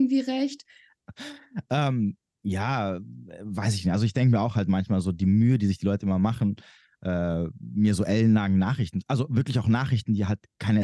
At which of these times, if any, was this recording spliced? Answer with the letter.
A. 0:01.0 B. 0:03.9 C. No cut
A